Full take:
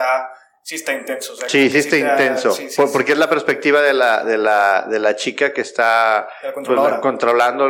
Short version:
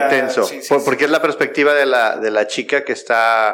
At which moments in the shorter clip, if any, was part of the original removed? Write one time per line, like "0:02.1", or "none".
0:02.2